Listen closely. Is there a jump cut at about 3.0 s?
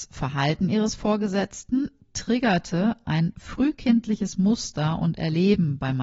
yes; 1 cut; at 3.0 s

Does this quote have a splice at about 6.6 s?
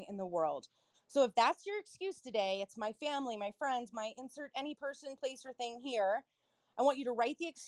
no; 2 cuts; at 0.9 s, 3.9 s

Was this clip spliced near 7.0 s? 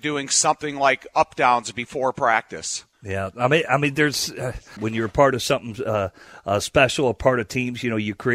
no; 2 cuts; at 2.9 s, 4.8 s

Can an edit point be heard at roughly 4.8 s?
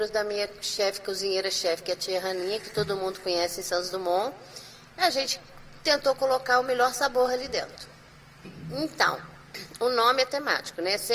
no; 1 cut; at 8.4 s

